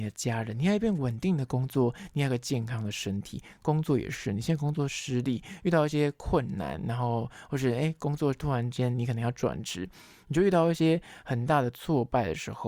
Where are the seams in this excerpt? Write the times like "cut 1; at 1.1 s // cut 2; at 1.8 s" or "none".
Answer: none